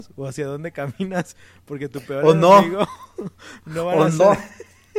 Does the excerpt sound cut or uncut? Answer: uncut